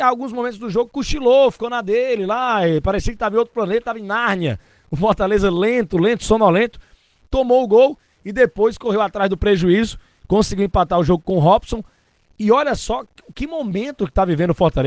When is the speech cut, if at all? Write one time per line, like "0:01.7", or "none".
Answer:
none